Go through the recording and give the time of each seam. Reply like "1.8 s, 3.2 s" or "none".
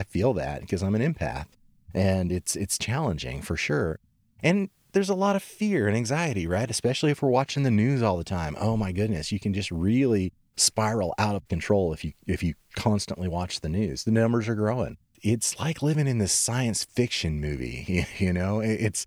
none